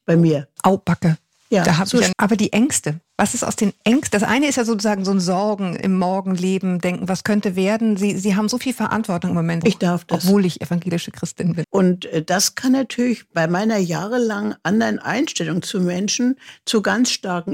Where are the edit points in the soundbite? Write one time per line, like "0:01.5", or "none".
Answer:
0:02.1
0:09.6
0:11.6